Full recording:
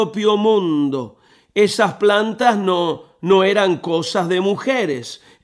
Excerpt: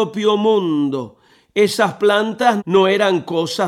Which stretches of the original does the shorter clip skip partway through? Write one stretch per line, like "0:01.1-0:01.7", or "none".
0:02.6-0:03.1